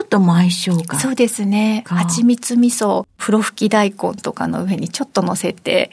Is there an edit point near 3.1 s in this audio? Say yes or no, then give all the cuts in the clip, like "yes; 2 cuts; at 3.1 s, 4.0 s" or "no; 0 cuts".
yes; 2 cuts; at 1.8 s, 3.1 s